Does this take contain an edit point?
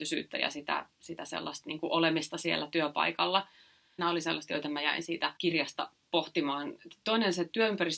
yes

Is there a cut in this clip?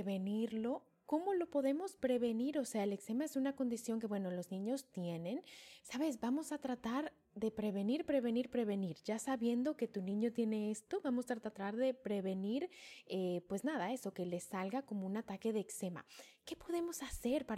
yes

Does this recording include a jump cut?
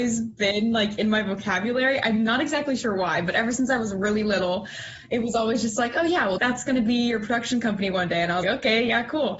yes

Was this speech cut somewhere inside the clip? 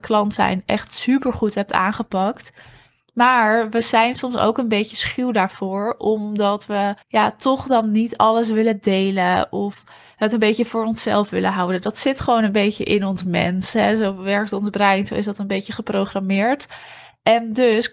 yes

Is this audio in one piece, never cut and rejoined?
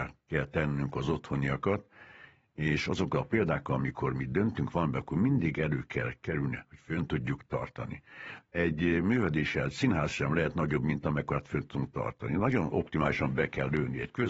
yes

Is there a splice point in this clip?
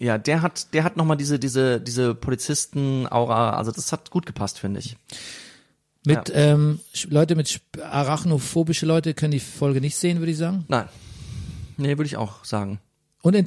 yes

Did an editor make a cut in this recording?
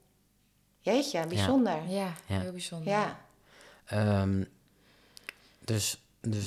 no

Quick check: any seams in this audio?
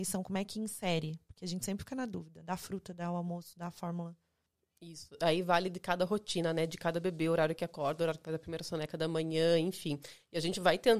no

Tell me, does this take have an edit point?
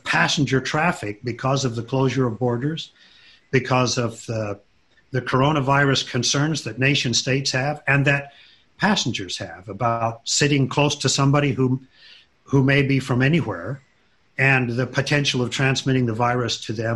no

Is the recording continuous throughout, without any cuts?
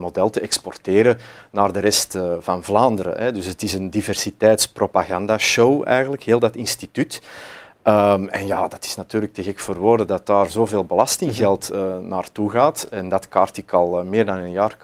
yes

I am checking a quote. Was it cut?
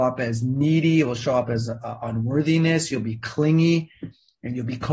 no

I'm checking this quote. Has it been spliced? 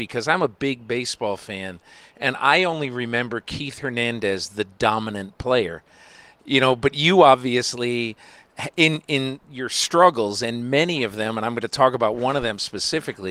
no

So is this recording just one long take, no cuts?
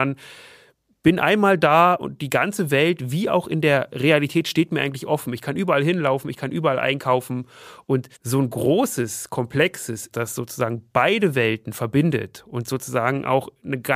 no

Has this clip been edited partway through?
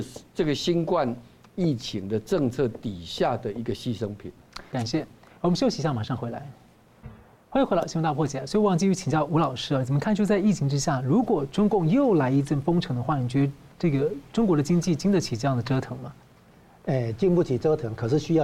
no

